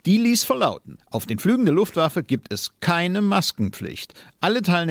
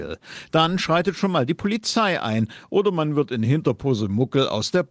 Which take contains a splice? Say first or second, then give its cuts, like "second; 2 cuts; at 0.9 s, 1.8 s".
first; 1 cut; at 1.0 s